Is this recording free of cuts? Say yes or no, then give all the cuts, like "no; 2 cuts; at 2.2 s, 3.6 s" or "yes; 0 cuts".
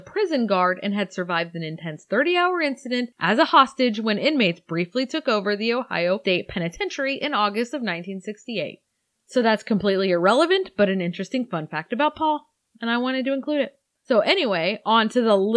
yes; 0 cuts